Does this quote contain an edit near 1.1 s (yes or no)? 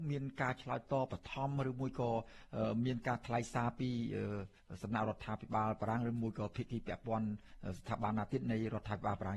yes